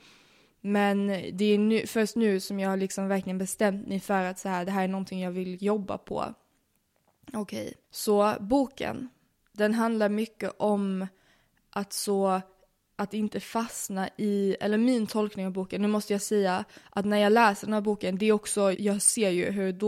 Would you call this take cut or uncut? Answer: cut